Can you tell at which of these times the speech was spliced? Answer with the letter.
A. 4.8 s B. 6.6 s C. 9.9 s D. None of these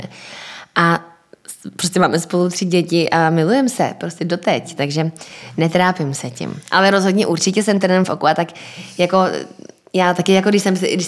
A